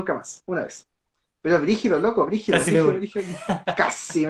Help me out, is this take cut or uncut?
uncut